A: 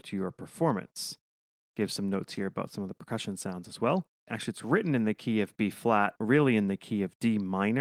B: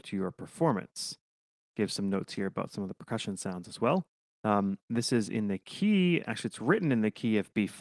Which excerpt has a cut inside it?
A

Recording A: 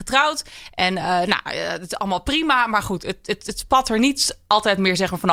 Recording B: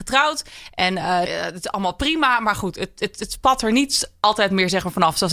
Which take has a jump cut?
B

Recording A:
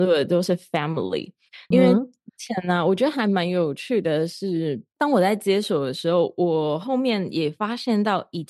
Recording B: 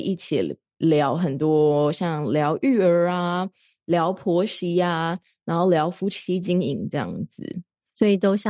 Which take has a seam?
A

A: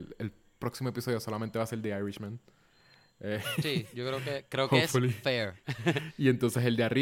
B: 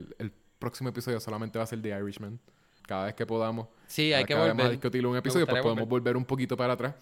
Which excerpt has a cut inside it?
B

